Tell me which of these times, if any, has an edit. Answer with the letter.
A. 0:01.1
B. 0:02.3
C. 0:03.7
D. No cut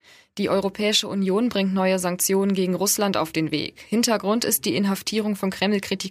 D